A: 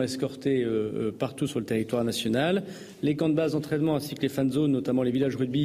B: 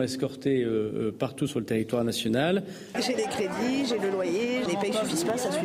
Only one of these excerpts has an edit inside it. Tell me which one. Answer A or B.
B